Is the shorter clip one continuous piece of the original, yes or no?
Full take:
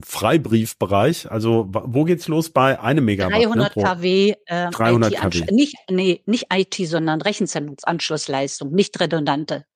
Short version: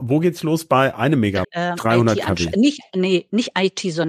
no